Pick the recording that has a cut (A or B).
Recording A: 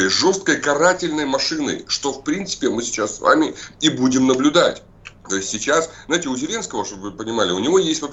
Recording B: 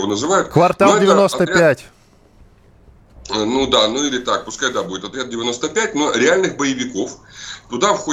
A